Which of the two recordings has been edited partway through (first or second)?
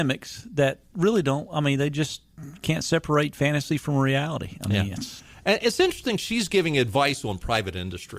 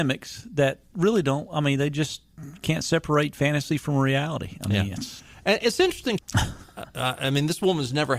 second